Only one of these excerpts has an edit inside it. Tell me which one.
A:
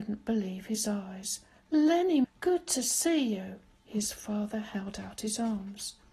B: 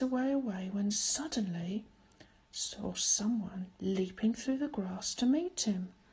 A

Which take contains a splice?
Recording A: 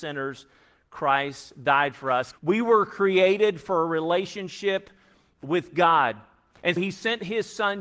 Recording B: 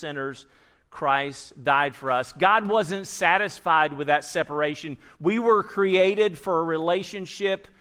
A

